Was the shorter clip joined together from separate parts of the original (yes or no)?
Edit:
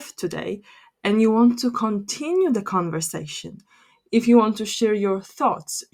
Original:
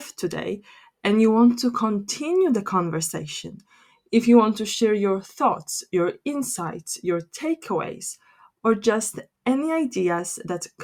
no